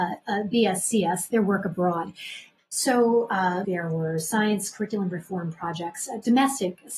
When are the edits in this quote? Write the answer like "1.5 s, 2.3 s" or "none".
2.6 s, 3.6 s